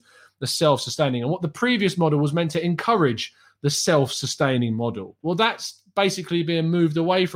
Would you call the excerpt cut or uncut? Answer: uncut